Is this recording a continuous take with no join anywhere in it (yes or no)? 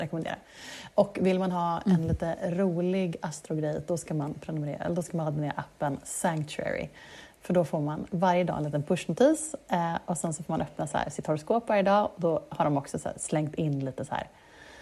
yes